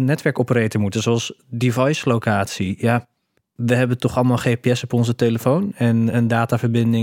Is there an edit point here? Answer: no; 0 cuts

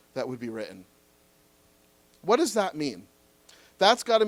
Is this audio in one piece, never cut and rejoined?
yes; 0 cuts

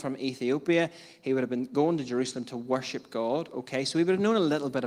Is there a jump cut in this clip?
no; 0 cuts

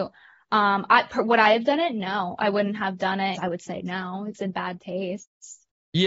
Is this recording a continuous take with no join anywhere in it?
no; 1 cut; at 3.3 s

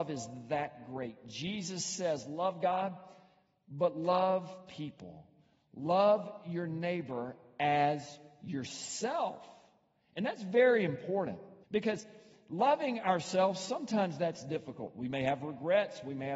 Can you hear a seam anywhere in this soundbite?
yes; 1 cut; at 11.6 s

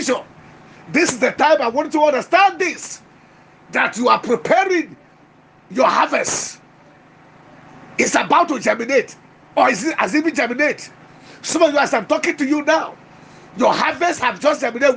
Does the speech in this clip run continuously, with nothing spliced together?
yes; 0 cuts

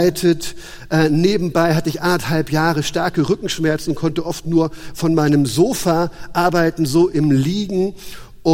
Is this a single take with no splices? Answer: yes; 0 cuts

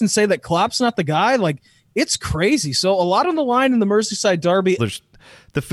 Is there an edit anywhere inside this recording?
yes; 1 cut; at 4.8 s

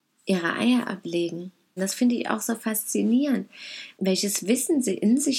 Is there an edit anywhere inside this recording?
yes; 2 cuts; at 1.8 s, 4.0 s

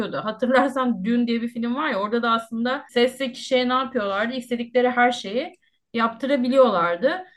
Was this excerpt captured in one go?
yes; 0 cuts

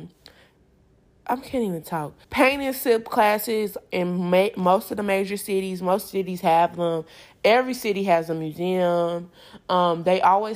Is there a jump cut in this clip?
yes; 1 cut; at 2.2 s

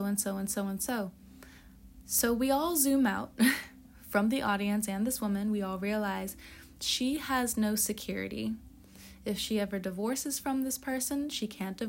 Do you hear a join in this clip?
no; 0 cuts

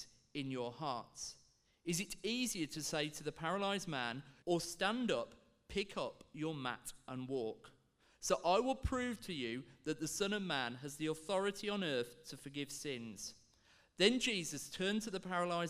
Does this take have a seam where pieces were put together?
yes; 1 cut; at 4.4 s

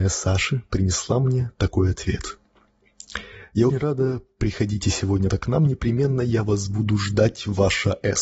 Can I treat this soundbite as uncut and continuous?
no; 2 cuts; at 3.7 s, 5.3 s

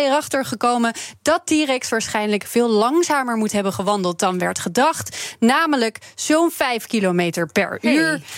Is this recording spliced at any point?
no; 0 cuts

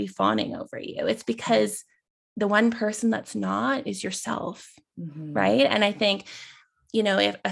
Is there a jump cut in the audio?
no; 0 cuts

